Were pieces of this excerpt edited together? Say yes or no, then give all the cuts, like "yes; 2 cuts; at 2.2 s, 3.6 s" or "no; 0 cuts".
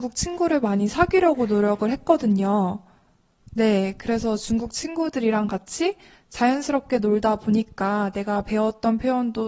no; 0 cuts